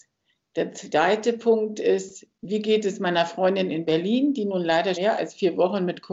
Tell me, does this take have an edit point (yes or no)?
yes